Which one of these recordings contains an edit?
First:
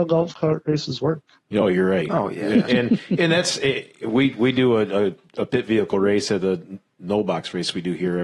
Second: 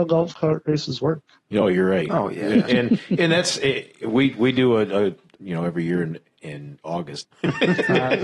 second; 2 cuts; at 5.4 s, 7.2 s

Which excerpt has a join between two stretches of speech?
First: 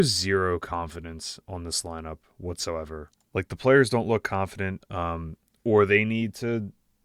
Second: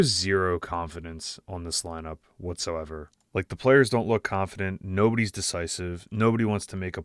first; 1 cut; at 4.8 s

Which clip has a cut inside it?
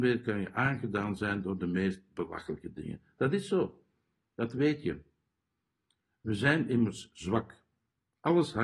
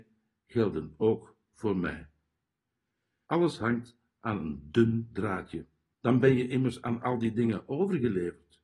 second; 2 cuts; at 3.3 s, 5.9 s

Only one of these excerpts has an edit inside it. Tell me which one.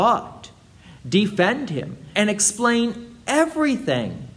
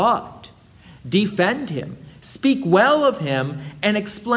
first; 1 cut; at 2.1 s

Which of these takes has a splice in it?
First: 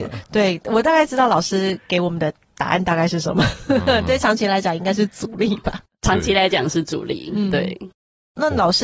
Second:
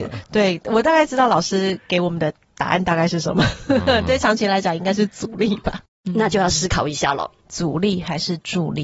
second; 2 cuts; at 5.9 s, 7.4 s

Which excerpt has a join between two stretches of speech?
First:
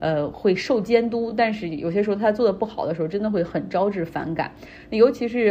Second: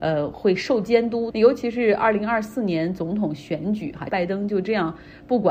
second; 2 cuts; at 1.3 s, 4.1 s

